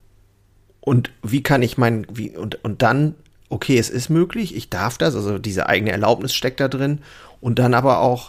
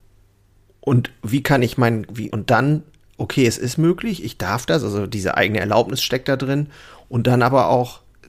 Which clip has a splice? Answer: second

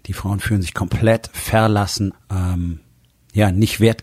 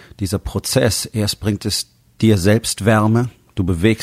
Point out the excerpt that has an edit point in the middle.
first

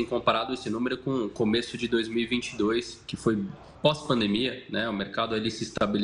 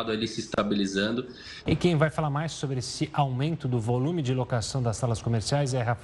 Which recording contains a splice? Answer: second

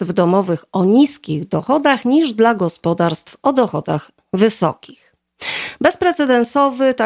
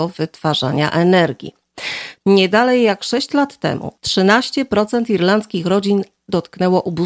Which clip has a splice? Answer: second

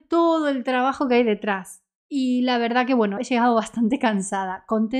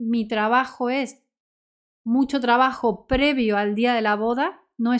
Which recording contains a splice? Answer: first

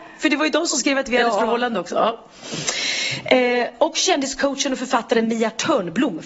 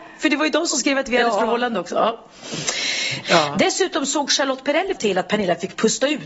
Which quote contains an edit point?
second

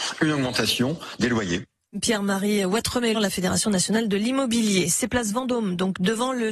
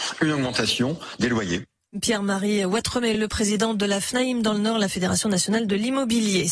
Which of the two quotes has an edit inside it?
first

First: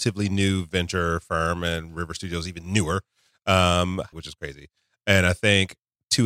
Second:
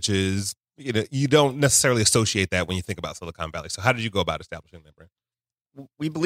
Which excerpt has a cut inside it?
first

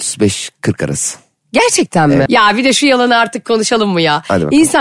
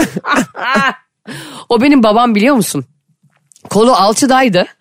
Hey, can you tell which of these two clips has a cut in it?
first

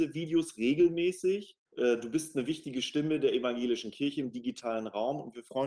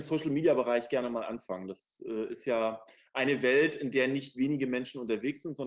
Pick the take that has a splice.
first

